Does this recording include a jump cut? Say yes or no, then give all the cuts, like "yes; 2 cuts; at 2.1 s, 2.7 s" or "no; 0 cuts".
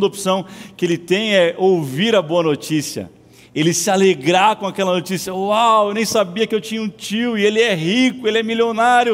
no; 0 cuts